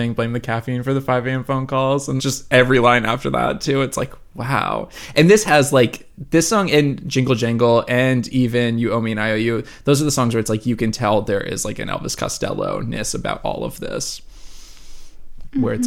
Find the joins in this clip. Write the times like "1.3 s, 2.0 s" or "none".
2.2 s